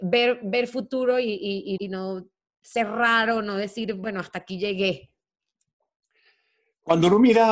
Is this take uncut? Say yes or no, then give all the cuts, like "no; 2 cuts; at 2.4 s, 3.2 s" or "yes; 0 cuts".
no; 1 cut; at 1.8 s